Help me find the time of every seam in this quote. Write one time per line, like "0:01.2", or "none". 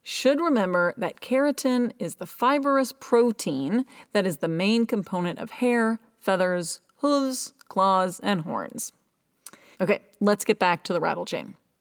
0:09.7